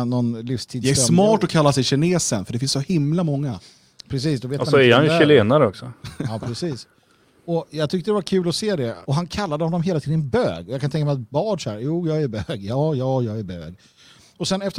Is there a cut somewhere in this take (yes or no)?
yes